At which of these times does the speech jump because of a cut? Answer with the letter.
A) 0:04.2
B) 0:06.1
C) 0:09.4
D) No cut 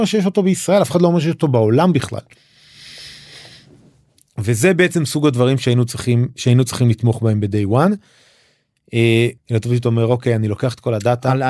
C